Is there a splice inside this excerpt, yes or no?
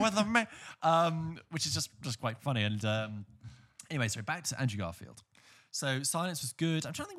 no